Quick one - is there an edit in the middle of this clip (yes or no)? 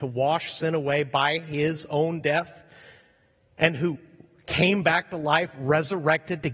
no